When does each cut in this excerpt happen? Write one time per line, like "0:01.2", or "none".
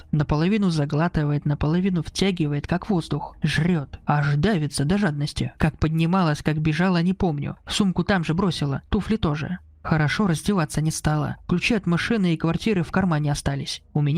0:05.6